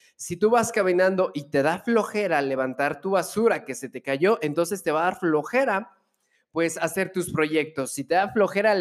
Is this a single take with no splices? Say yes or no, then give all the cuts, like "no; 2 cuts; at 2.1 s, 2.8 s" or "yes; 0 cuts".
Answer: yes; 0 cuts